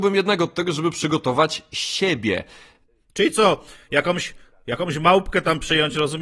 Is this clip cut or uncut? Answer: uncut